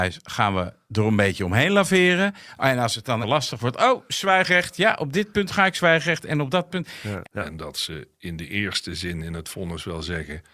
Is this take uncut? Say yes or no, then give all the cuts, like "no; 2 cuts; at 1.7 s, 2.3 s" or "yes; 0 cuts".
no; 2 cuts; at 3.2 s, 7.2 s